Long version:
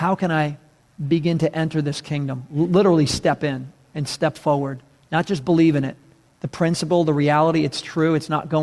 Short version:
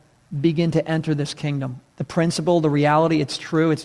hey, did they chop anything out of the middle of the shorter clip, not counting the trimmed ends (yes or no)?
yes